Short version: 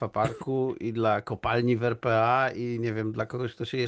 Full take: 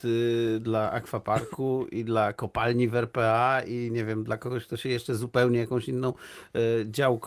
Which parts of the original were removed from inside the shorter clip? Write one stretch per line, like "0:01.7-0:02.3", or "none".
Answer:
none